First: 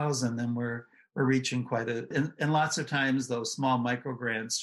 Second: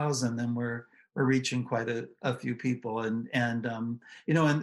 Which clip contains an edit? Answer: first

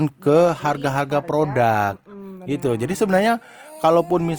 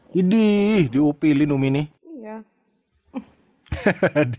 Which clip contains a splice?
second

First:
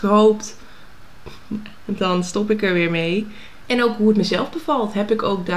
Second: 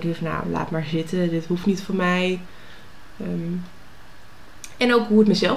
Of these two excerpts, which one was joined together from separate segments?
first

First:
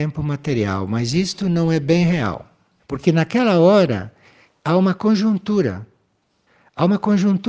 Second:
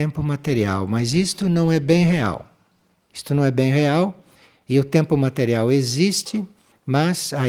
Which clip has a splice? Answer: first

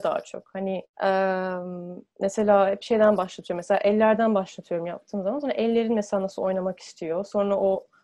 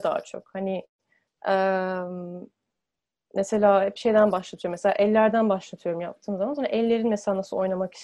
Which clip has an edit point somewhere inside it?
first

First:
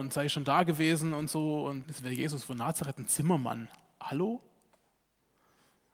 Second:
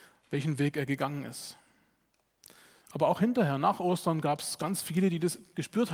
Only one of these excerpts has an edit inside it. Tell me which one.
first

